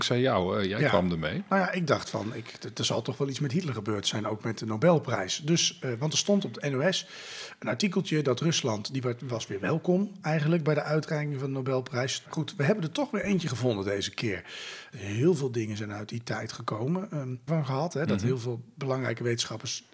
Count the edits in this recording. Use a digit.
3